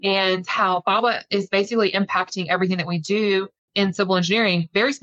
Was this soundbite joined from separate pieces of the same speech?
no; 0 cuts

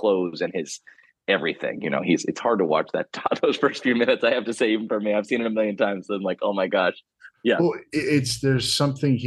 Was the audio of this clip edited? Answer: no; 0 cuts

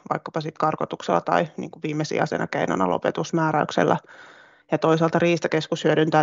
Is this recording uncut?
yes; 0 cuts

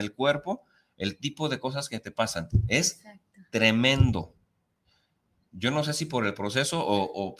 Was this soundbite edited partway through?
no; 0 cuts

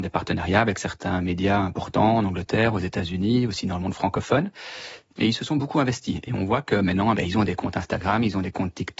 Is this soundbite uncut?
no; 2 cuts; at 5.1 s, 7.1 s

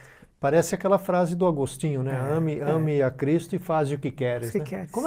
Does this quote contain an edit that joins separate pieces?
no; 0 cuts

